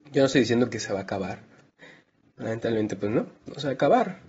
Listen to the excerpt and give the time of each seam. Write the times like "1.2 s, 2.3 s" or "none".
none